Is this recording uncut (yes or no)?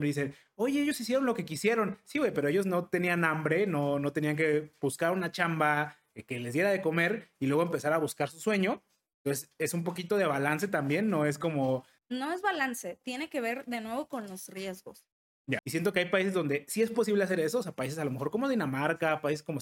no